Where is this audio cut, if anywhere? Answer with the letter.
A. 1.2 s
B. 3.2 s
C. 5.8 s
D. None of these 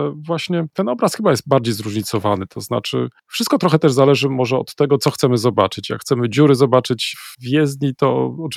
B